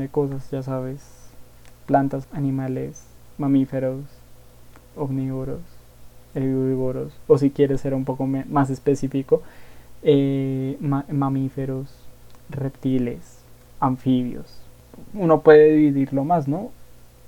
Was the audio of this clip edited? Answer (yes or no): yes